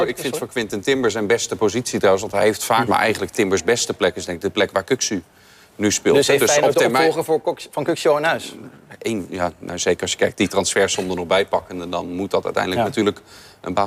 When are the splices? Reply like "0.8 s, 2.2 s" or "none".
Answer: 2.9 s